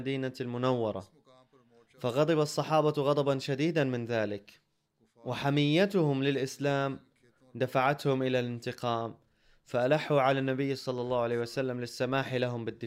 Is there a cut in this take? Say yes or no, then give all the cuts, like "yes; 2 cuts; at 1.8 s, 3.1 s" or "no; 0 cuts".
no; 0 cuts